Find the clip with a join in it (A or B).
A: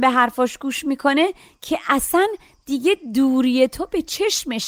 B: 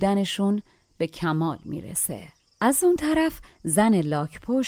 B